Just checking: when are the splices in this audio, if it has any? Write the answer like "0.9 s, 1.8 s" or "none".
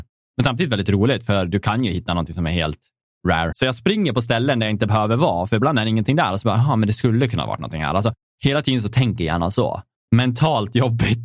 3.5 s, 9.9 s